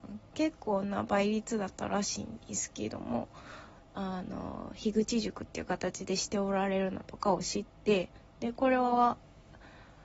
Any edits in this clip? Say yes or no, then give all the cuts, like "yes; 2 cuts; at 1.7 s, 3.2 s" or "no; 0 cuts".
yes; 1 cut; at 3.9 s